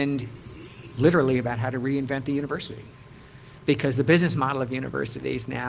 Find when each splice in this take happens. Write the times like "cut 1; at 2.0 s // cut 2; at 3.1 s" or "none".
cut 1; at 0.9 s